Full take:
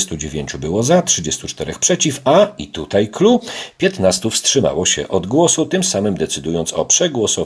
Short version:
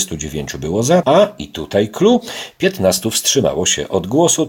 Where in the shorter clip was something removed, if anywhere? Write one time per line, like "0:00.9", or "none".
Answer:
0:01.0